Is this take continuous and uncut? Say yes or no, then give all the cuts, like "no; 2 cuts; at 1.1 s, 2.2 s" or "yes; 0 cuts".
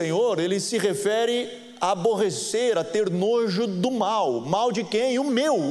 yes; 0 cuts